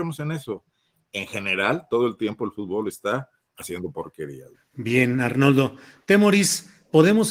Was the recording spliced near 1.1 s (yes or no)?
no